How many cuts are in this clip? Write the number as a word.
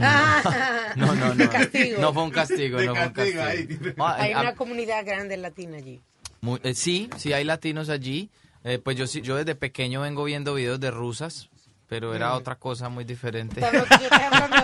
two